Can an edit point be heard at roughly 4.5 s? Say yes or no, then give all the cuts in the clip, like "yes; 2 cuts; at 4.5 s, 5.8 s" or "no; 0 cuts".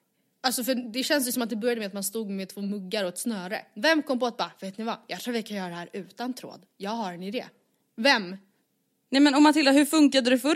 no; 0 cuts